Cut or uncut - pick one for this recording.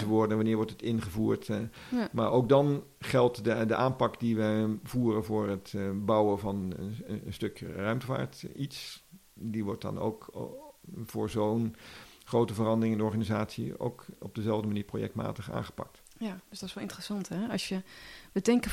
uncut